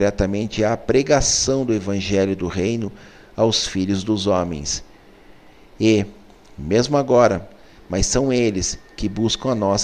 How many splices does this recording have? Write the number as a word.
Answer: one